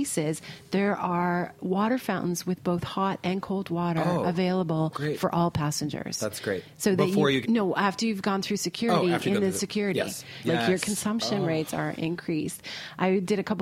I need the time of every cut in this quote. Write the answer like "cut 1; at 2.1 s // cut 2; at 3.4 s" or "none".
cut 1; at 7.4 s // cut 2; at 10.4 s